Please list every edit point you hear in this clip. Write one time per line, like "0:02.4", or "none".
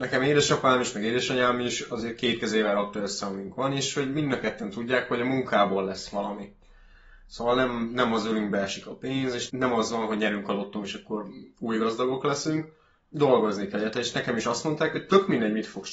none